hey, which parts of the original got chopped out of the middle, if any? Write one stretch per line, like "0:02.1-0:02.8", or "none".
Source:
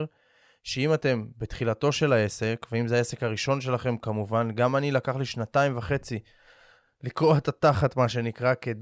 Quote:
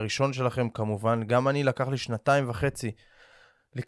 none